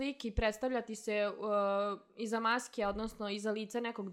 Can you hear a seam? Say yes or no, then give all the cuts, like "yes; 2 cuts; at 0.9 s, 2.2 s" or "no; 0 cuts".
no; 0 cuts